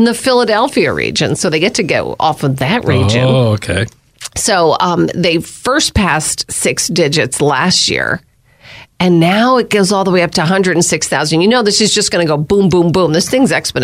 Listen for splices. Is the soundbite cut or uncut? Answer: uncut